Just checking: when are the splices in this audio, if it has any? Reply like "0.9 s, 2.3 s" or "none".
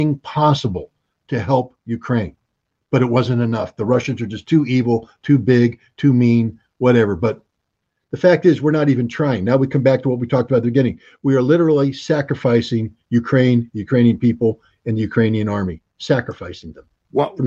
none